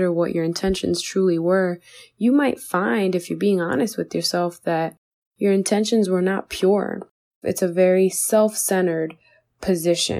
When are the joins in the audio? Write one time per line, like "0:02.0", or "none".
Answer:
0:07.4